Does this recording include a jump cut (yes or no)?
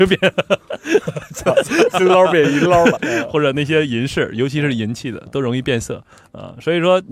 yes